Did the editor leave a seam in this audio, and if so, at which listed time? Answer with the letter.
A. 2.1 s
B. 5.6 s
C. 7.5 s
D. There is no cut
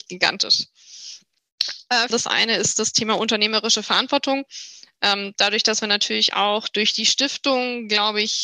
A